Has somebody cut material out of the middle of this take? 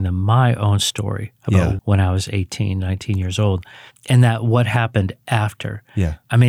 yes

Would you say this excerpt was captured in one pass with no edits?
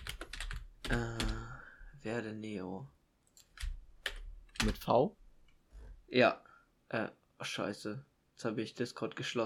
no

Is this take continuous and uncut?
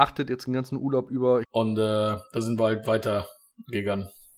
no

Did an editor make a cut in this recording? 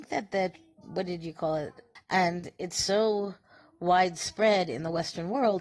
yes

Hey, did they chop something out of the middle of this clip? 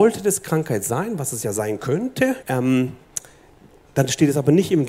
yes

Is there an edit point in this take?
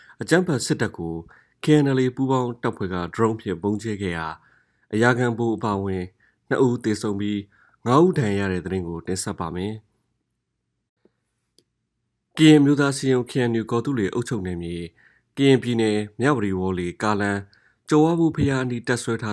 no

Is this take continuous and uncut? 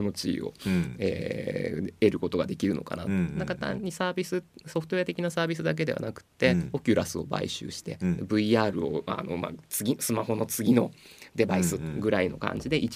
yes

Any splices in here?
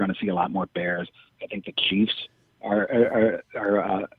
no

